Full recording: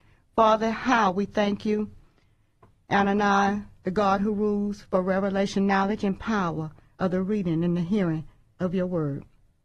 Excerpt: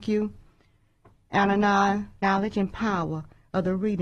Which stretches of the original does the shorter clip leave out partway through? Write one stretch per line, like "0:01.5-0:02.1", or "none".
0:03.8-0:05.7